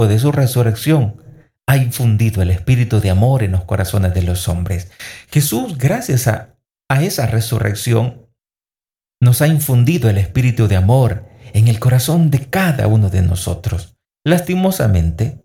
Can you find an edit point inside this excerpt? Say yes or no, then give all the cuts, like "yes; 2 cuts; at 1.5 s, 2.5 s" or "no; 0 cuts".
no; 0 cuts